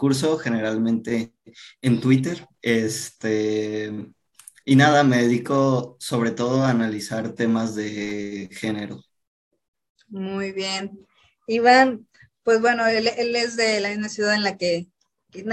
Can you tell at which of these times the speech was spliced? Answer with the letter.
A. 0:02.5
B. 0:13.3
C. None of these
A